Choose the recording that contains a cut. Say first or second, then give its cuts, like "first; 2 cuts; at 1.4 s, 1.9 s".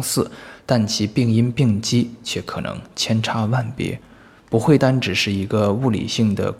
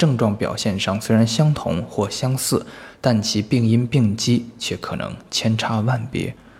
first; 1 cut; at 4.8 s